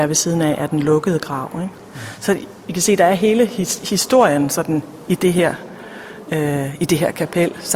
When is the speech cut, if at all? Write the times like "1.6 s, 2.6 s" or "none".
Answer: none